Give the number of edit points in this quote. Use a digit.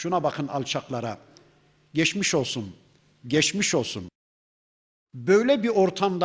0